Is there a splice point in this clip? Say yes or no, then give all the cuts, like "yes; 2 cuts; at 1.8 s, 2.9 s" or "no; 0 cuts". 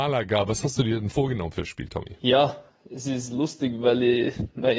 no; 0 cuts